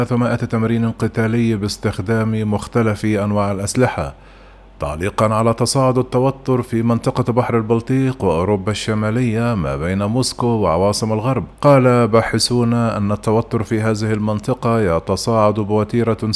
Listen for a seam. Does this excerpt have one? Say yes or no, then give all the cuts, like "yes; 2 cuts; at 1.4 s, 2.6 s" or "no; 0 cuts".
yes; 1 cut; at 11.5 s